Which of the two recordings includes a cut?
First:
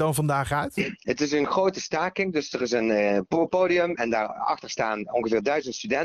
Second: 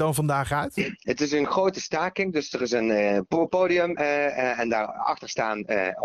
first; 2 cuts; at 4.0 s, 5.1 s

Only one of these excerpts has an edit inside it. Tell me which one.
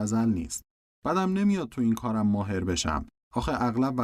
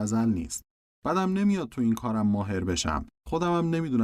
second; 1 cut; at 3.1 s

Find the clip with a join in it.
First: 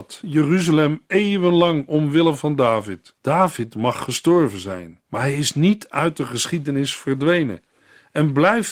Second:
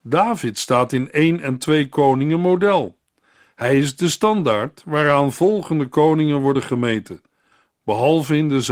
first; 2 cuts; at 3.2 s, 5.0 s

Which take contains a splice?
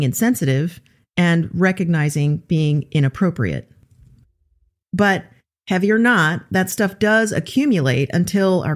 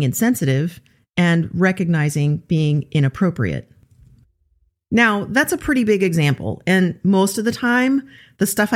first; 1 cut; at 4.8 s

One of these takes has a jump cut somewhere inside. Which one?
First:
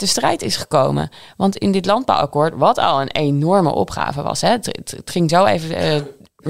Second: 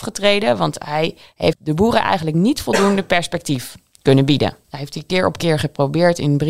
second; 2 cuts; at 1.5 s, 4.6 s

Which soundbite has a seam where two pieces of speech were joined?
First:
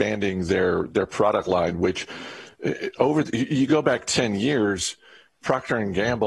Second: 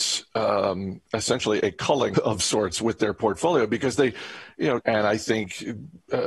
second; 2 cuts; at 2.1 s, 4.8 s

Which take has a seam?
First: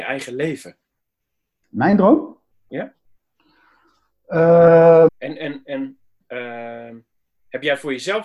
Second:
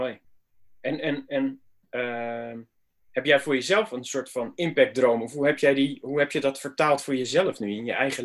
first; 1 cut; at 5.1 s

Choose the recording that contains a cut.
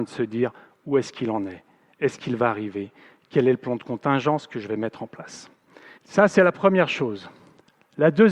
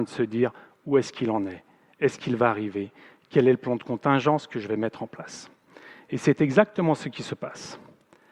first; 1 cut; at 6.0 s

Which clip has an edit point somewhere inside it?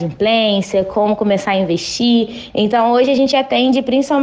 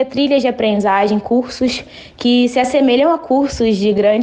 first; 1 cut; at 2.5 s

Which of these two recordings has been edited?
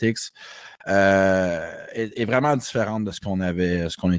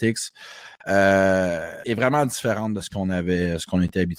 second; 1 cut; at 1.8 s

